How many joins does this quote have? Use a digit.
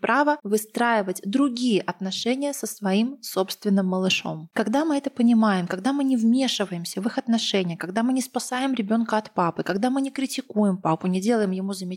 0